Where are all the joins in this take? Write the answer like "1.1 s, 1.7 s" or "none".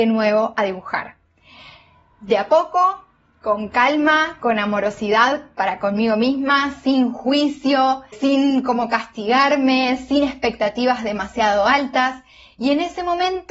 8.1 s